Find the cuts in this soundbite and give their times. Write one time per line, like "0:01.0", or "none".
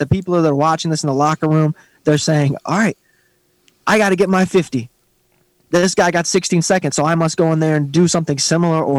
none